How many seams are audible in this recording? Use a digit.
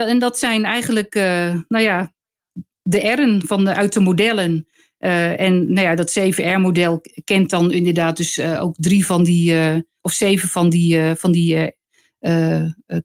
0